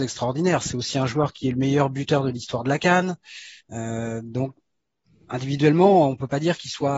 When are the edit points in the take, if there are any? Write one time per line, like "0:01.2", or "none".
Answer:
none